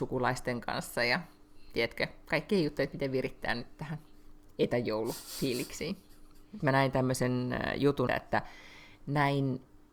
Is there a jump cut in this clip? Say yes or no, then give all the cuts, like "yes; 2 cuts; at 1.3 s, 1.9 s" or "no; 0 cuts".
yes; 2 cuts; at 6.6 s, 8.1 s